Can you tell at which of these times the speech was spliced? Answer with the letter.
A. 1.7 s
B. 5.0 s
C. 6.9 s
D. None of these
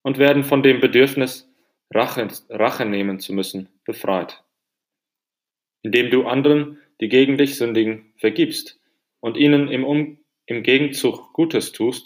D